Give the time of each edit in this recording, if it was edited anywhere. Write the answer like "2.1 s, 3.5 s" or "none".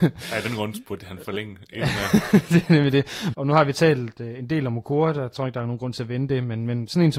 3.3 s